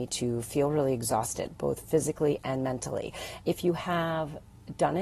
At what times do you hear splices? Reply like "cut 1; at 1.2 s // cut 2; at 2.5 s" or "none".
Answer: cut 1; at 3.4 s

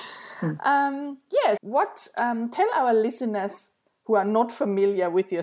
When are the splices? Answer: cut 1; at 1.6 s

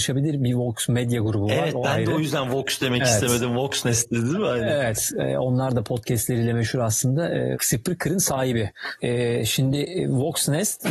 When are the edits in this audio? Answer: cut 1; at 7.5 s // cut 2; at 9.0 s

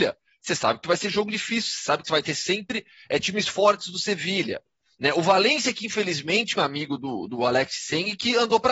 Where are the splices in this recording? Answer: cut 1; at 6.6 s

